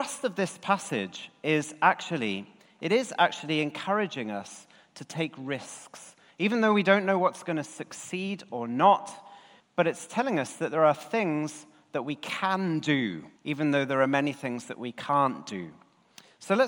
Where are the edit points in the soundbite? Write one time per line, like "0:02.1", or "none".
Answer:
0:09.6
0:13.4